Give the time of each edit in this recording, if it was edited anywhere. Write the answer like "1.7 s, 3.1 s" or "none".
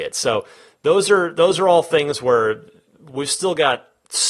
none